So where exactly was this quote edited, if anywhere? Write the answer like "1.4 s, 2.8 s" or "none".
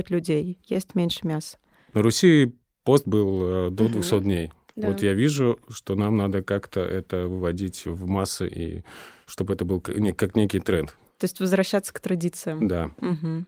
none